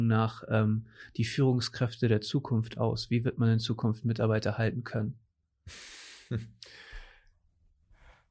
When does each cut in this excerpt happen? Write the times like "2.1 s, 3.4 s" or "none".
none